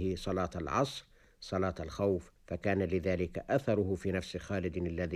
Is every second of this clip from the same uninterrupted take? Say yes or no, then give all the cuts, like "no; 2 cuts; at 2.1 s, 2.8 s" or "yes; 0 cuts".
no; 1 cut; at 2.4 s